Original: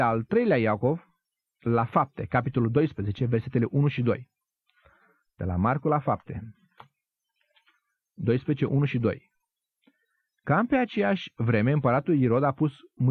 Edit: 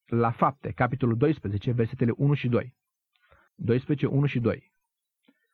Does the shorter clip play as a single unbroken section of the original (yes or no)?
no